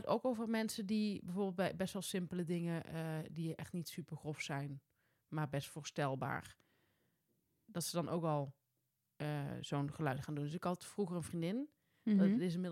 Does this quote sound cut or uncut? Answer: uncut